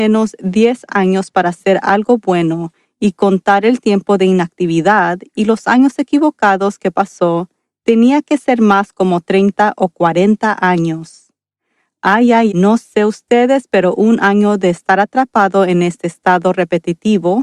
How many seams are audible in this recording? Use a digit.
1